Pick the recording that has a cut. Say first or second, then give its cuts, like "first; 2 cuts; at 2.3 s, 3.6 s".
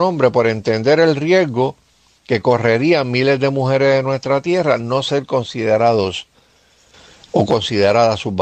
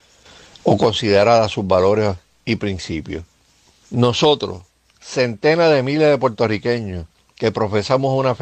second; 1 cut; at 3.8 s